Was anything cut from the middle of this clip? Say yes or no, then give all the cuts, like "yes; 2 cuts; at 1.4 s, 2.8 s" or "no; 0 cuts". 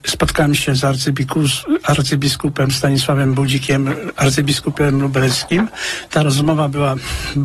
no; 0 cuts